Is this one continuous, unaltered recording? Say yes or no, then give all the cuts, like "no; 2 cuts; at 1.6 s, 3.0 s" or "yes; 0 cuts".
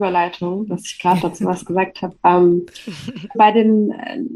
no; 1 cut; at 3.3 s